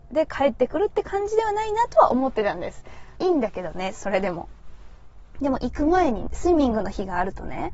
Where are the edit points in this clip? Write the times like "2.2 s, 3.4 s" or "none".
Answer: 3.1 s, 5.4 s